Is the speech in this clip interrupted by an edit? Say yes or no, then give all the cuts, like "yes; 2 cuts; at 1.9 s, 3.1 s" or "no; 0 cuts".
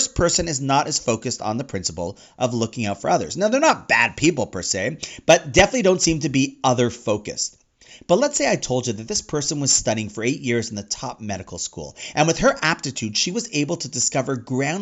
no; 0 cuts